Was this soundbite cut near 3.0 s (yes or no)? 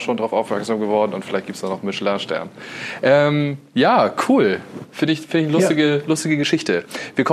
no